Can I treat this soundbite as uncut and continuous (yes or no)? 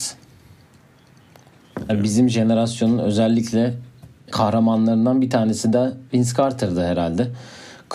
no